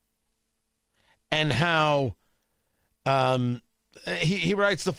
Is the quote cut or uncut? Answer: uncut